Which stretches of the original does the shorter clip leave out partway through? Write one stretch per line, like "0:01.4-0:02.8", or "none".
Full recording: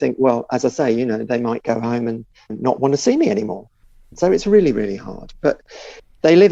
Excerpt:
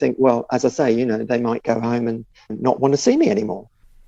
none